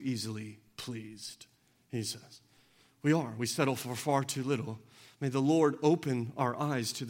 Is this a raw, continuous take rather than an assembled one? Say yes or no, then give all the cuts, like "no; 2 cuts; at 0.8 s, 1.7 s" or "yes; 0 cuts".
yes; 0 cuts